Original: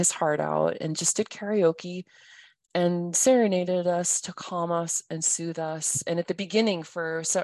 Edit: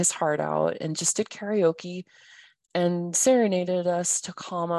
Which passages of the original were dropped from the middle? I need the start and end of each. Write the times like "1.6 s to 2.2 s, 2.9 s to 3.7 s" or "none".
none